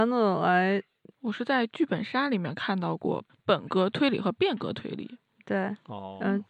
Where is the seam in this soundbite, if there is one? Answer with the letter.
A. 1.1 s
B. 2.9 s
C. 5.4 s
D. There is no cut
A